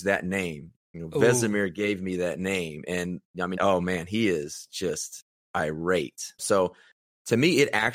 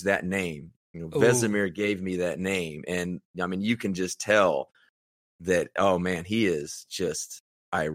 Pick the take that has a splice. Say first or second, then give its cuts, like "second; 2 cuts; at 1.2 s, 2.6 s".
first; 2 cuts; at 3.5 s, 6.4 s